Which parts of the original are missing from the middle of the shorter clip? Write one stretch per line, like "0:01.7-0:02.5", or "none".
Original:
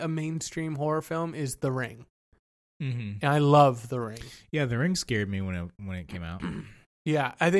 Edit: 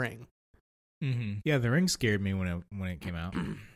0:03.2-0:04.5